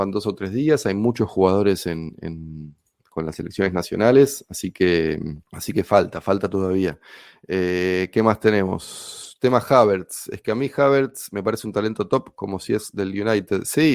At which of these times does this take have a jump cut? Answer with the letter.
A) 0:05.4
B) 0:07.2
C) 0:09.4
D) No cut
A